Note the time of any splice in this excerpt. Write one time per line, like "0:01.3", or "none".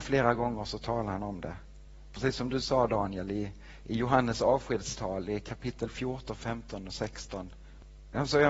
none